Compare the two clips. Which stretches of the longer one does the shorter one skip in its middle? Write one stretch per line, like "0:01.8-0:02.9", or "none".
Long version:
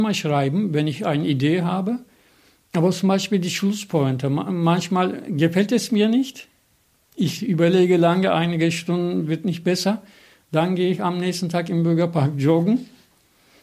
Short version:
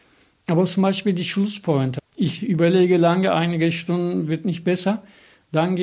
0:04.2-0:07.0

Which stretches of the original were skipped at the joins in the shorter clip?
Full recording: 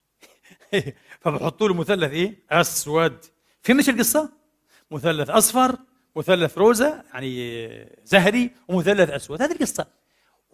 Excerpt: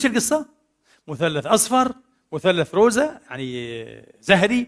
none

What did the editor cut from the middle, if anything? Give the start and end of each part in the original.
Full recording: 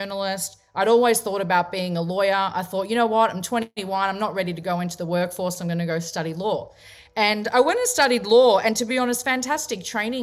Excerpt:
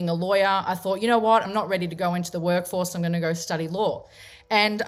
0:03.3-0:04.1

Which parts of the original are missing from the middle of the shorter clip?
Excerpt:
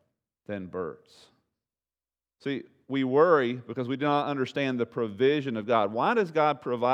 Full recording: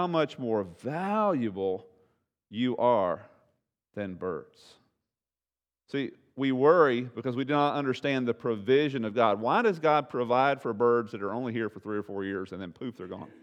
none

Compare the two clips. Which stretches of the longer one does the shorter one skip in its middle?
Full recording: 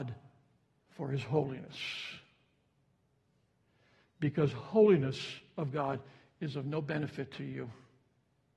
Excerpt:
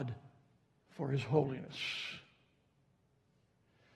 none

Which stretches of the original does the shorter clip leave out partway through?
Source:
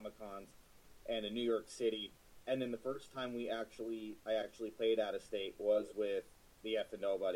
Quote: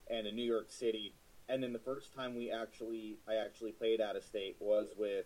none

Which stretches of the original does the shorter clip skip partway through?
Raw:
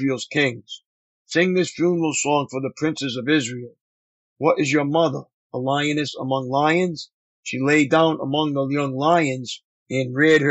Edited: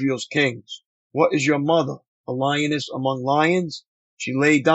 0:01.0-0:04.3

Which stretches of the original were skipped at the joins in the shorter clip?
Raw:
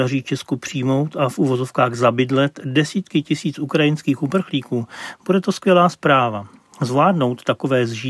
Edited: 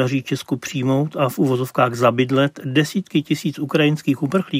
none

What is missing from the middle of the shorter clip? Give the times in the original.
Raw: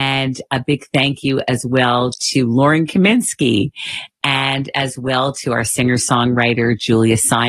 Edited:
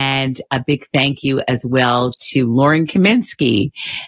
none

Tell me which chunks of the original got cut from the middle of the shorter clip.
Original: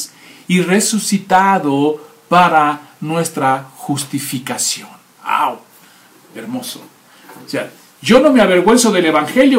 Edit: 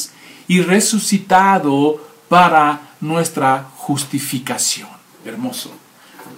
0:05.1-0:06.2

